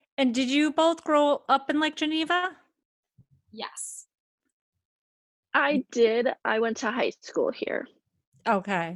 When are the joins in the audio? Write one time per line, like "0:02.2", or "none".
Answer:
none